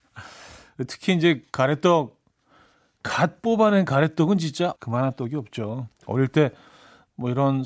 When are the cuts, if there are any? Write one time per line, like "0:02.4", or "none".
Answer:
0:04.8
0:05.9